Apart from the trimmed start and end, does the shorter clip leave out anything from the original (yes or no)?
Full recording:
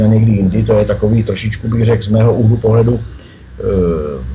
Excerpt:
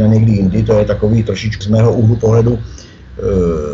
yes